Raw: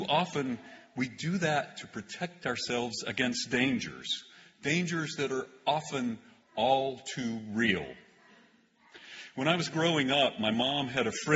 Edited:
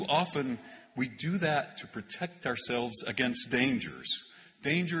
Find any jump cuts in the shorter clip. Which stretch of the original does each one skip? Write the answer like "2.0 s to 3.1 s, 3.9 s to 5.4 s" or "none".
none

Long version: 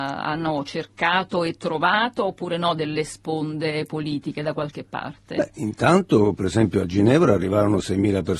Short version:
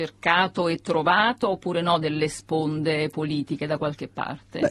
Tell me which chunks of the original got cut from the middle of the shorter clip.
none

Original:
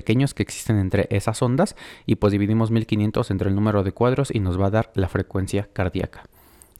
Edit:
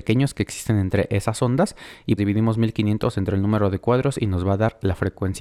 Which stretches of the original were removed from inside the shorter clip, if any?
2.2 s to 2.3 s

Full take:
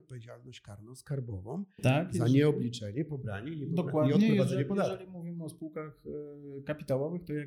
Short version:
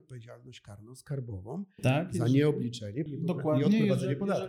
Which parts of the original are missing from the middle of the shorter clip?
3.1 s to 3.5 s

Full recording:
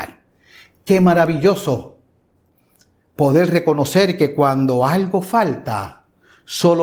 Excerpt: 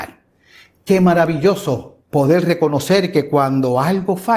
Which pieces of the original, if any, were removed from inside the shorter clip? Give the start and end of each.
2.0 s to 3.1 s

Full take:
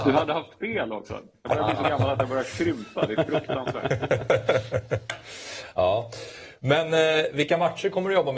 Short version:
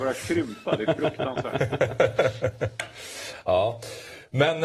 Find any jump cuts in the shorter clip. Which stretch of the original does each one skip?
none

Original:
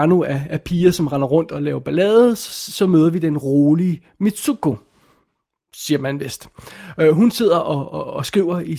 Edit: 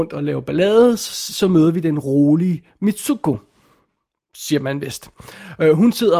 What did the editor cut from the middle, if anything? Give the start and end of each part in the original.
none

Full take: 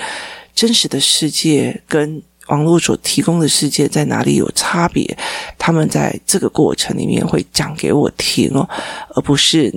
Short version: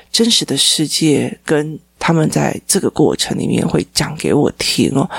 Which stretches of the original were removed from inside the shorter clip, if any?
2.4 s to 5.6 s

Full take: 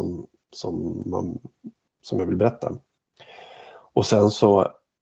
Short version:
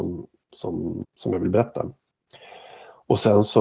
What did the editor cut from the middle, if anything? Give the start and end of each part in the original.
1.0 s to 1.9 s

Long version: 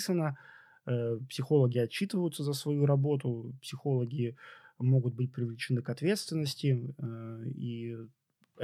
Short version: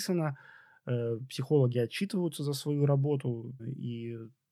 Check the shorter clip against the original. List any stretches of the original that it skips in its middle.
3.6 s to 7.4 s

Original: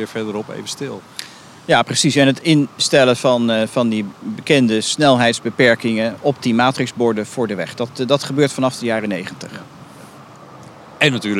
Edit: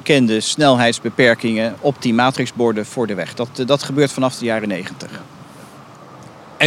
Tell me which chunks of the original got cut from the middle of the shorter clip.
none

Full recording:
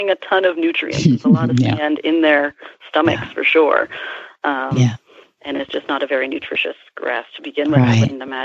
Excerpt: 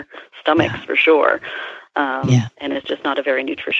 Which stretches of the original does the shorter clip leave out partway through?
5.0 s to 5.4 s

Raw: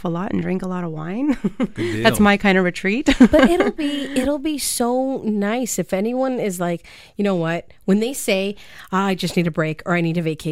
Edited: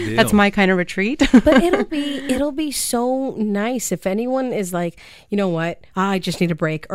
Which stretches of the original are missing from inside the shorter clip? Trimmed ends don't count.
7.8 s to 8.9 s

